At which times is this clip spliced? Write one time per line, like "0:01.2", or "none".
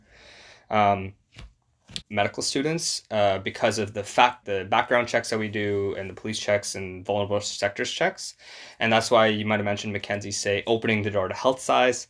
0:02.0
0:04.4